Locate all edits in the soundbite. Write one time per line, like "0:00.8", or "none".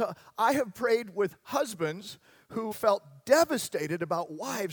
0:02.7